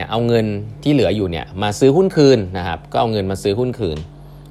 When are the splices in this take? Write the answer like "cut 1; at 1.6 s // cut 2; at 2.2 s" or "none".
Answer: none